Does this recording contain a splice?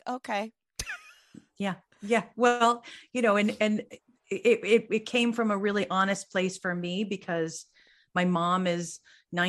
no; 0 cuts

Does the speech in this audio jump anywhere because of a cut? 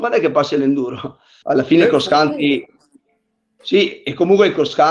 yes; 1 cut; at 1.4 s

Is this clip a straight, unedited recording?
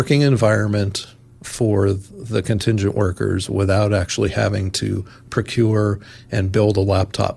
yes; 0 cuts

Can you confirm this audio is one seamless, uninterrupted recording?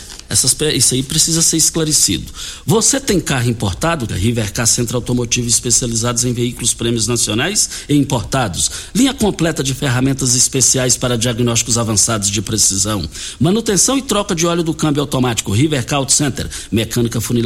no; 1 cut; at 4.1 s

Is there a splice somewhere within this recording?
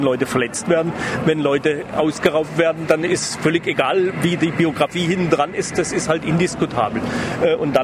no; 0 cuts

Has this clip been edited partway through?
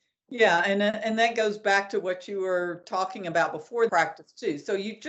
yes; 1 cut; at 3.9 s

